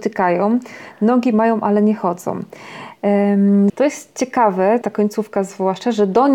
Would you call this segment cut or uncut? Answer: cut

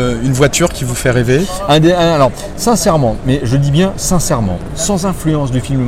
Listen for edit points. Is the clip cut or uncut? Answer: uncut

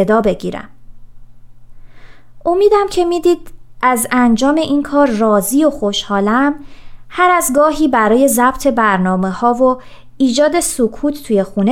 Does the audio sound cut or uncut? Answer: uncut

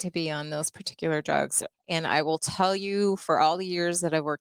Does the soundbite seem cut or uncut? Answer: cut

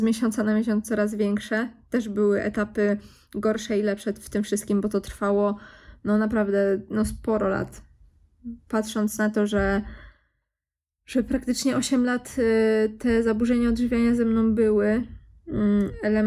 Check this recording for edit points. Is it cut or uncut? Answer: uncut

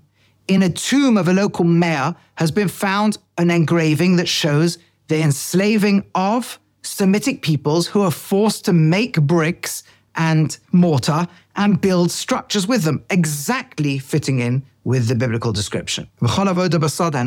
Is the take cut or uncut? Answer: cut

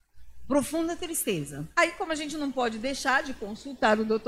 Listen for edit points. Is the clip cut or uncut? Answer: cut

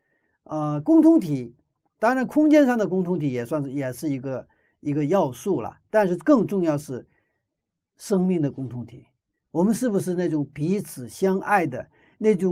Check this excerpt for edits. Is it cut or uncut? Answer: uncut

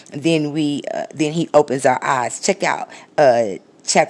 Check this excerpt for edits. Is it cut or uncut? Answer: uncut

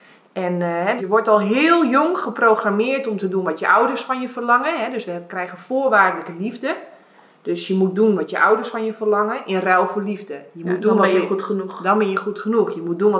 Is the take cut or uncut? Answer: cut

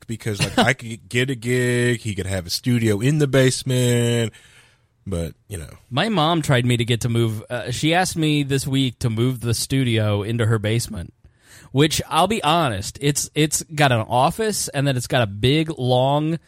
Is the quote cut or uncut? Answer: uncut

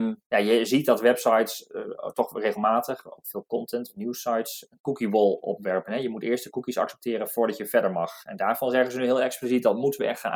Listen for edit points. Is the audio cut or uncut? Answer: uncut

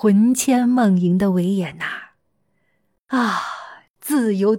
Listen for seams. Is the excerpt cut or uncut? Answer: uncut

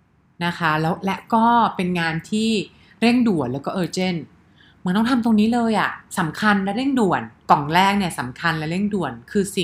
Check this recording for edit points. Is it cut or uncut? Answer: cut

